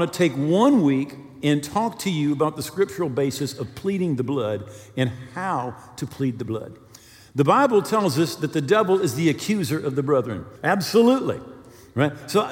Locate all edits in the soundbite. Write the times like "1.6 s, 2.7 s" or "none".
10.6 s